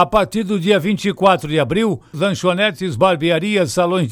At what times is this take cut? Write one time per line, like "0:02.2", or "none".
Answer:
0:02.1